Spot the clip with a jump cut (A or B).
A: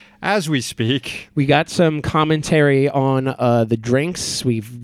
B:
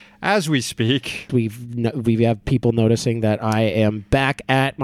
B